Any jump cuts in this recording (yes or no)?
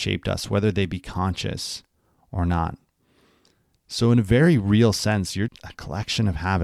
yes